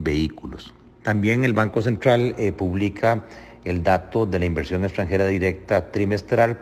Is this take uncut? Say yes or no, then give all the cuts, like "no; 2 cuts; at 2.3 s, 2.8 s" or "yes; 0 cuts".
no; 1 cut; at 0.9 s